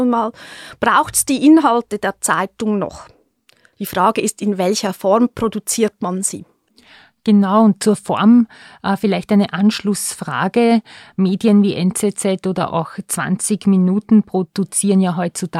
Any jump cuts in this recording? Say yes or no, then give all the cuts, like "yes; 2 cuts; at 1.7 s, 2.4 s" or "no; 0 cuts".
yes; 1 cut; at 3.7 s